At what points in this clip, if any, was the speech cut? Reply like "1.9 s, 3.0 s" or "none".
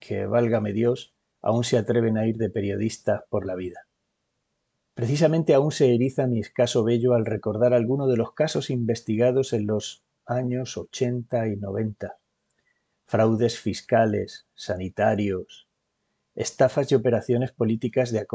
none